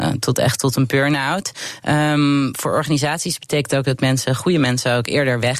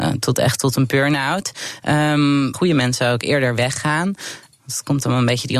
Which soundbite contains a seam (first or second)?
second